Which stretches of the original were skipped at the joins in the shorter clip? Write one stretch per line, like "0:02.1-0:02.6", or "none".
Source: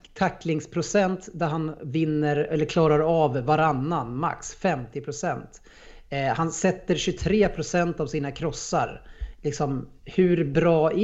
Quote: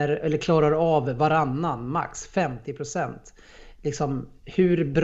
0:06.0-0:09.3